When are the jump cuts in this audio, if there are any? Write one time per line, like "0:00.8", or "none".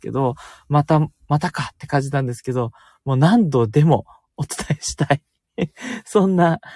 none